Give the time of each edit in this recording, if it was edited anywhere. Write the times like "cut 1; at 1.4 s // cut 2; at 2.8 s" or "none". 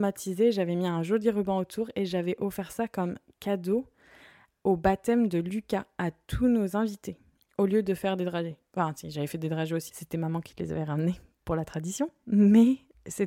cut 1; at 9.9 s